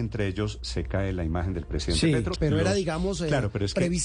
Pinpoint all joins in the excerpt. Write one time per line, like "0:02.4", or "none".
0:02.4